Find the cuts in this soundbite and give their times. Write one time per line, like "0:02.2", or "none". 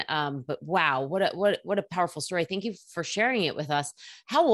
none